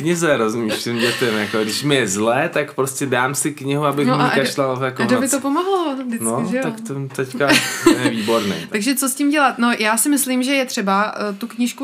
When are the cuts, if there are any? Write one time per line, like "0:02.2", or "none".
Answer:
none